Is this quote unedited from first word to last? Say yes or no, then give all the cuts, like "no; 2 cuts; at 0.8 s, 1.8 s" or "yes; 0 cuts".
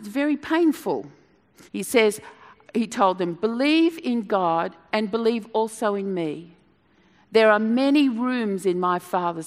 no; 1 cut; at 1.7 s